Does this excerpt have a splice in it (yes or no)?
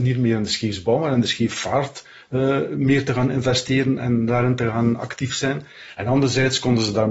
yes